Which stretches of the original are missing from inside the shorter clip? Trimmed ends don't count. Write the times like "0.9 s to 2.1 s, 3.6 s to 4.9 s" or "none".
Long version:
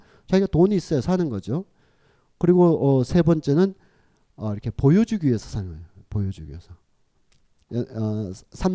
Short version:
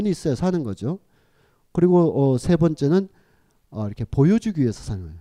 none